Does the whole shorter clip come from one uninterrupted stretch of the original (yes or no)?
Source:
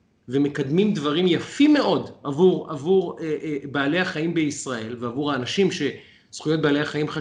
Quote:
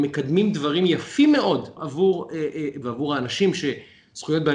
no